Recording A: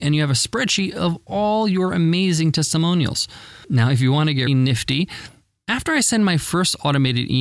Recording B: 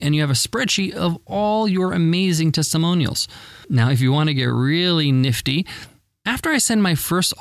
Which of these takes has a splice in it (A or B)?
A